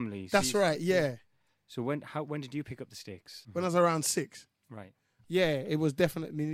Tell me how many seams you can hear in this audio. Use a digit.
2